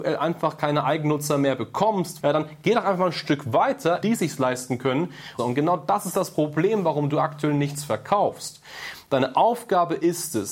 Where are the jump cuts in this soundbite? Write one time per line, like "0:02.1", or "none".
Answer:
0:02.2
0:04.0
0:05.4